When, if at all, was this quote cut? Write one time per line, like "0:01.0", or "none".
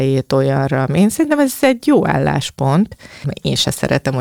0:03.2